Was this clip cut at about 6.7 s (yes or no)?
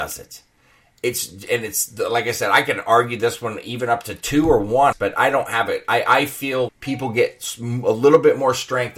yes